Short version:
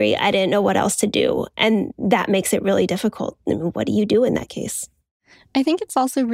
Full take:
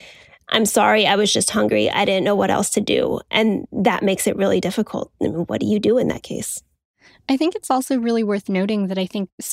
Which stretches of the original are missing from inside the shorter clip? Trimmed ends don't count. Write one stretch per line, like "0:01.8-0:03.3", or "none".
none